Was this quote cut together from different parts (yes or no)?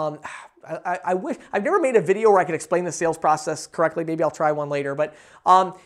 no